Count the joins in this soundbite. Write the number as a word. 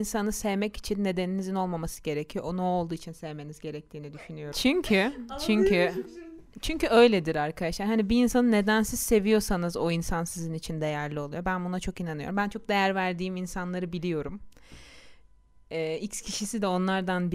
one